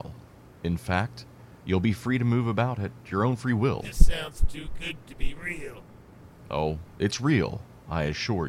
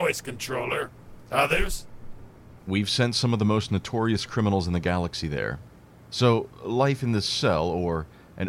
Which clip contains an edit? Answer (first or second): second